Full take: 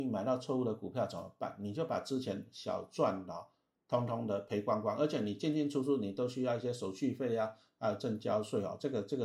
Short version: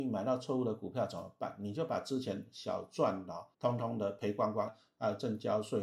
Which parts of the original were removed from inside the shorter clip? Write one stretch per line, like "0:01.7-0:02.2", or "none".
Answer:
0:03.5-0:03.8
0:05.0-0:07.5